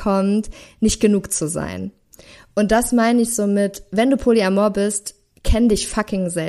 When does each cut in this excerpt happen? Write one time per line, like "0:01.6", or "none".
none